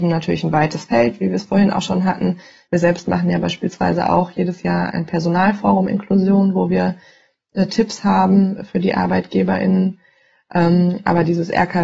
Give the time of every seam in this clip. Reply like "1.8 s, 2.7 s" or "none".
2.7 s, 4.9 s